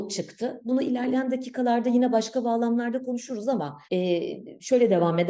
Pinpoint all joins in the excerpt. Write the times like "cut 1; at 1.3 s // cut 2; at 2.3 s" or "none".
cut 1; at 3.8 s

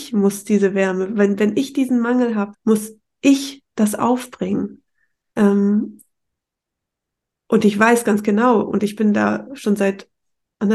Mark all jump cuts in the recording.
cut 1; at 2.5 s

